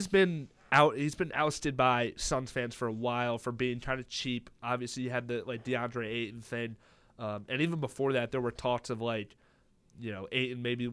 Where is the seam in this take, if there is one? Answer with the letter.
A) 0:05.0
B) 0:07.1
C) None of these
C